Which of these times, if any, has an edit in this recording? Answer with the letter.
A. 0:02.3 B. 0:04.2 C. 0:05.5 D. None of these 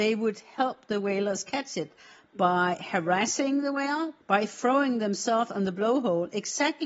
B